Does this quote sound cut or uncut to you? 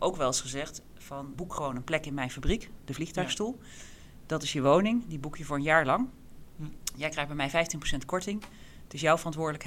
cut